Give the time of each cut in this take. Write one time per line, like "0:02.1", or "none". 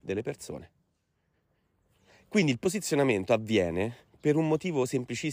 none